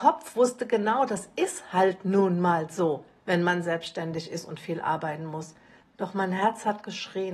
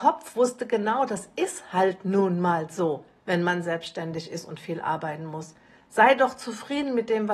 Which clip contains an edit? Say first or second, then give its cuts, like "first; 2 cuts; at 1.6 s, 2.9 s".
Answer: first; 1 cut; at 5.8 s